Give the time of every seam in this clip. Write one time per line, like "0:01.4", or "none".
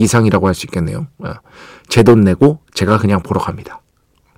none